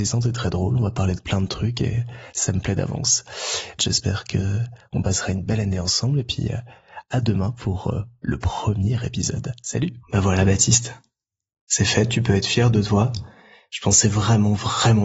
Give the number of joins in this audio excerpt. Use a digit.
2